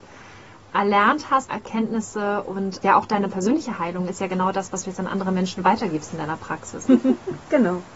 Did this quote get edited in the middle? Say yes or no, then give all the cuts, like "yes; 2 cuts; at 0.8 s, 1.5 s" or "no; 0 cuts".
yes; 3 cuts; at 1.5 s, 2.8 s, 6.9 s